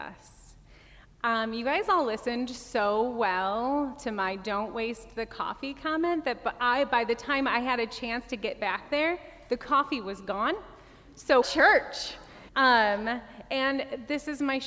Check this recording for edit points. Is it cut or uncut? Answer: cut